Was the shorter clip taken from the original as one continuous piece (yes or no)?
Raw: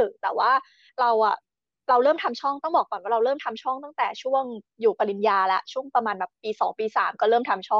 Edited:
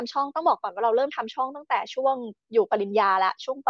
yes